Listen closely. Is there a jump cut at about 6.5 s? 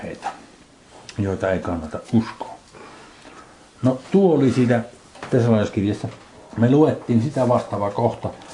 no; 0 cuts

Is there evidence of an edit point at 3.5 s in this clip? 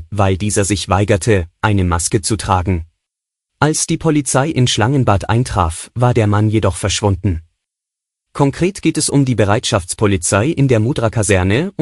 yes; 2 cuts; at 3.5 s, 8.3 s

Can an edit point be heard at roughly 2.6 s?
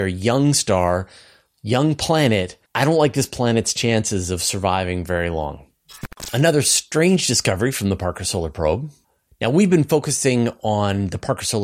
yes; 1 cut; at 2.6 s

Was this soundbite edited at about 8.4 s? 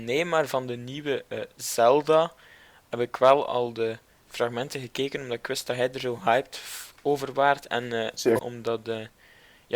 yes; 1 cut; at 8.4 s

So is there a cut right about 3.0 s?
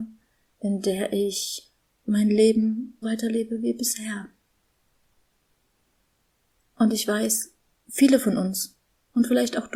yes; 1 cut; at 3.0 s

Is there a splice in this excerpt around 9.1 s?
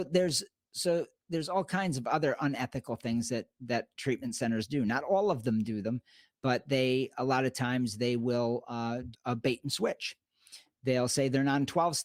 yes; 1 cut; at 9.1 s

